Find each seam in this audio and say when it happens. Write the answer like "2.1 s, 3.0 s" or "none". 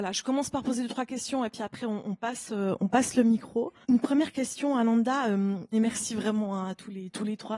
3.8 s, 5.7 s